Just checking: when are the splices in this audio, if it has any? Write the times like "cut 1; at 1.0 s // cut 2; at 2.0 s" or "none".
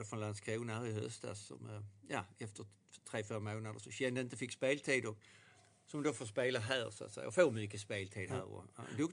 none